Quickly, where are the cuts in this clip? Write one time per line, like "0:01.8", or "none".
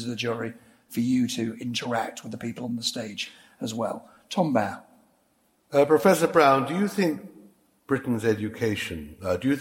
none